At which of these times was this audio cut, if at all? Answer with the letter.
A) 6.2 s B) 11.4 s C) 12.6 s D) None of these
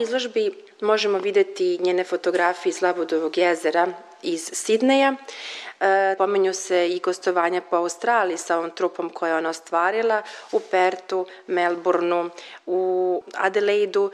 A